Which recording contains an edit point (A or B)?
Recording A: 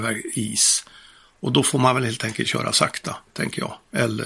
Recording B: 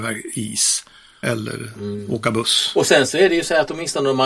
B